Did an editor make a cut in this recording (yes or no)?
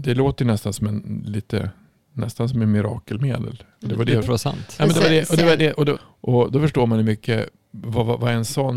yes